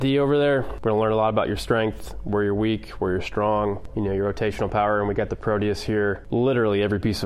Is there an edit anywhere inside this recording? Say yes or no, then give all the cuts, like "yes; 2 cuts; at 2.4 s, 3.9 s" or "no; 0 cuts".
no; 0 cuts